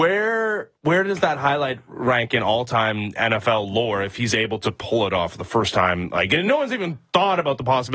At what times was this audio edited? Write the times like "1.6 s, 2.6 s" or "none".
none